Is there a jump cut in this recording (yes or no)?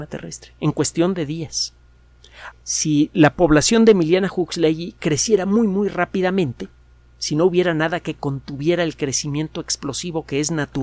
yes